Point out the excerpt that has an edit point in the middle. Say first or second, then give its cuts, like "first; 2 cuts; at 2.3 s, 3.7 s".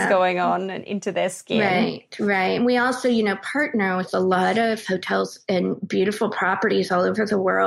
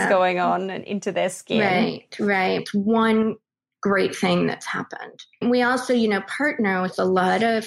second; 2 cuts; at 2.6 s, 5.4 s